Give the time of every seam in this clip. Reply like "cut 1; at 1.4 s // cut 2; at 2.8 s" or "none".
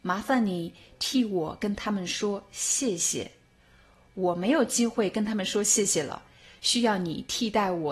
none